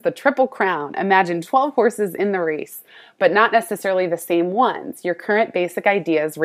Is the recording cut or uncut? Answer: uncut